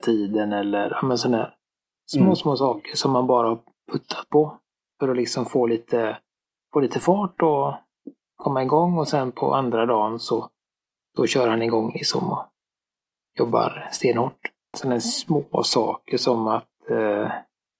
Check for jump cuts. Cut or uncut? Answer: cut